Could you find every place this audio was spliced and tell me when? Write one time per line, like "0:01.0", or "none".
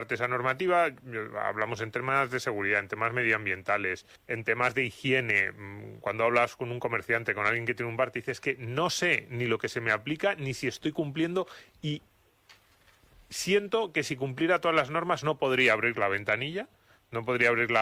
0:04.2